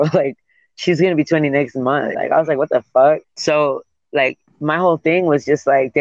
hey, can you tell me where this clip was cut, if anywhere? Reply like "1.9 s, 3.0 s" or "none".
2.1 s, 3.2 s